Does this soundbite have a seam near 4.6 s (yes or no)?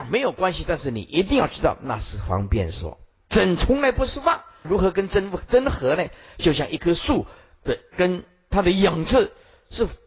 yes